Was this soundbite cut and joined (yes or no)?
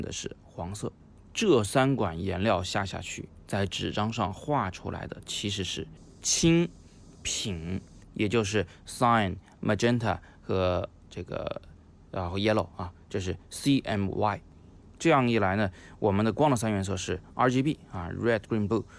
yes